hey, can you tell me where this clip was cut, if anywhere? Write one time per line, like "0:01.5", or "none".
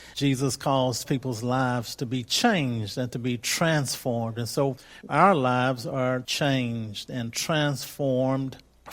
none